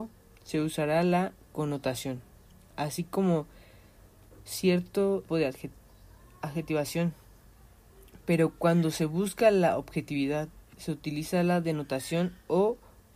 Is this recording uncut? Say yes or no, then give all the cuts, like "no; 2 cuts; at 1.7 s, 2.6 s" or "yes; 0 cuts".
no; 1 cut; at 5.3 s